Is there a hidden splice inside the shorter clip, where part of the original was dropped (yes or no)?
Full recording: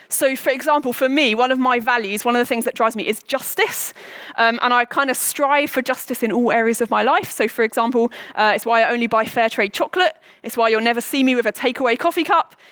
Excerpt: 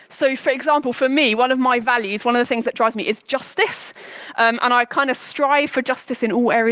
no